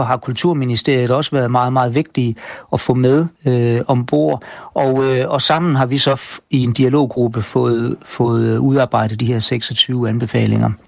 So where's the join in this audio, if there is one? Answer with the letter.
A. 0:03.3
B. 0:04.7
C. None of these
A